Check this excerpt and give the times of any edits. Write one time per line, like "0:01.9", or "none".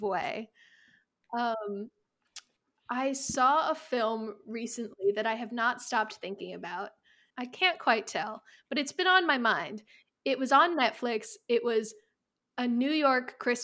0:07.3